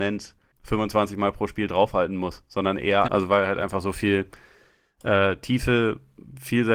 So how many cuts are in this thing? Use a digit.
1